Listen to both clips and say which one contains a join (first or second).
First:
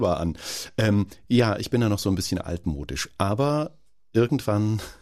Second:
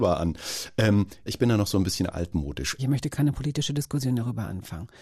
second